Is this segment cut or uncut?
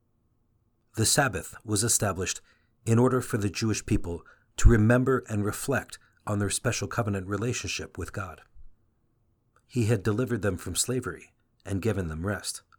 uncut